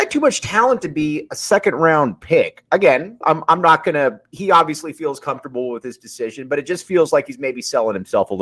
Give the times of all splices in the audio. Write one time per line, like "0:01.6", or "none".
0:03.2